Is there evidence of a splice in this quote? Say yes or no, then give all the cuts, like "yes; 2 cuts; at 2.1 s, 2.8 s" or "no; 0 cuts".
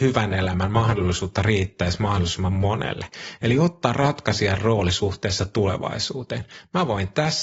no; 0 cuts